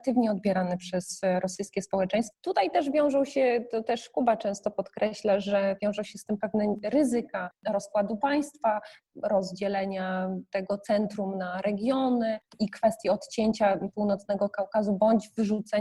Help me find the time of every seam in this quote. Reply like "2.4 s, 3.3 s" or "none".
2.3 s, 12.5 s

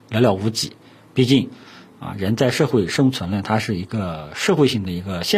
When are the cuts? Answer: none

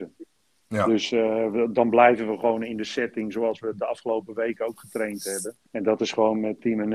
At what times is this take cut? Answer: 5.7 s

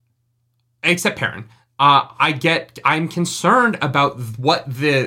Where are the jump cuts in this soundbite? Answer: 2.2 s

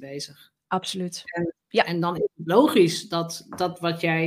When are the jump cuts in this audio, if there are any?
none

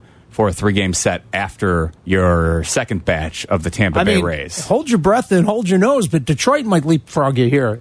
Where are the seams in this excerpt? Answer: 2.0 s

